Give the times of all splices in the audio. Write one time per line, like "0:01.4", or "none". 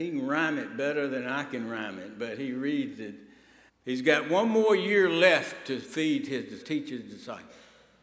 0:03.7
0:06.6